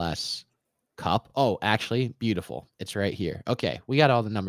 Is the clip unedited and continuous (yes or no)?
yes